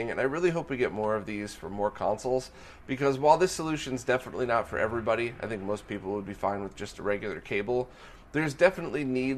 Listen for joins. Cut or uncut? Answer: uncut